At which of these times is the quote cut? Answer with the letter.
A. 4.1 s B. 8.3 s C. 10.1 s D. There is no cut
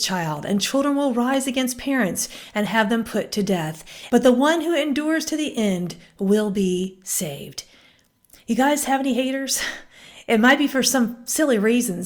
A